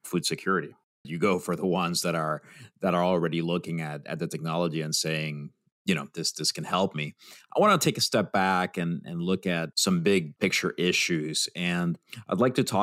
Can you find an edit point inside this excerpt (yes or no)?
yes